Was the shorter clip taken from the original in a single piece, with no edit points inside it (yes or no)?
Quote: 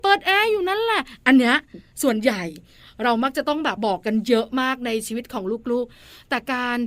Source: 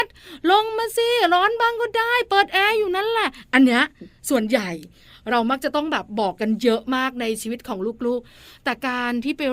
no